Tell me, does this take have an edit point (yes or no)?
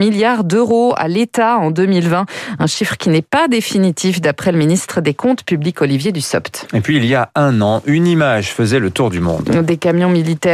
no